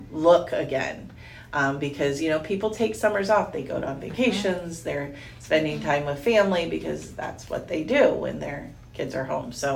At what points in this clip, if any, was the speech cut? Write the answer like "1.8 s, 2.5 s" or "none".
none